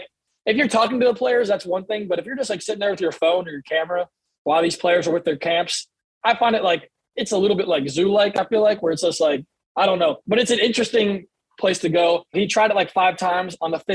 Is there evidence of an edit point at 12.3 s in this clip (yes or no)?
yes